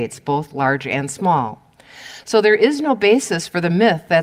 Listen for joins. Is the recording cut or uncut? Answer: uncut